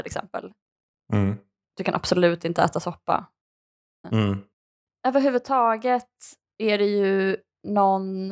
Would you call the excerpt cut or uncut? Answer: cut